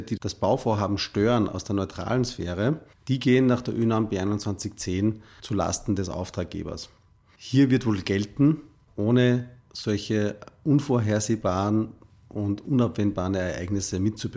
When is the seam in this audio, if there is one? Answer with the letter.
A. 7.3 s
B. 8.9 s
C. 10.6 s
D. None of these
B